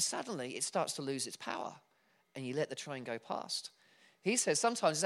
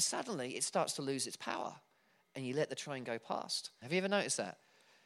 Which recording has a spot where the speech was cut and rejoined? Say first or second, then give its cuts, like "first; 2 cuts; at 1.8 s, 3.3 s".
second; 1 cut; at 3.8 s